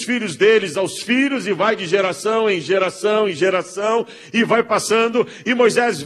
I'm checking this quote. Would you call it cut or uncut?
uncut